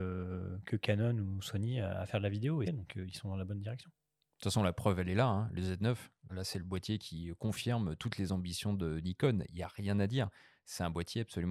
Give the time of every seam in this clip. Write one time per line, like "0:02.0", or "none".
0:02.6
0:06.3